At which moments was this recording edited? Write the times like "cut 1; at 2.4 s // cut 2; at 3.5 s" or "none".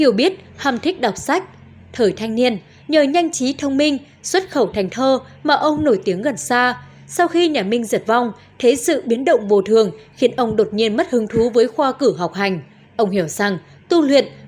cut 1; at 12.8 s